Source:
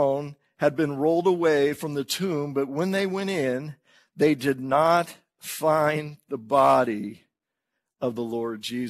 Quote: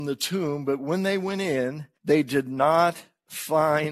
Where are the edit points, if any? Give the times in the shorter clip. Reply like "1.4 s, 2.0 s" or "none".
1.9 s